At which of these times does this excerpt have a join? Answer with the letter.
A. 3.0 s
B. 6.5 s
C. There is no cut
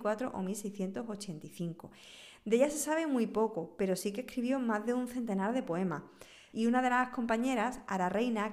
B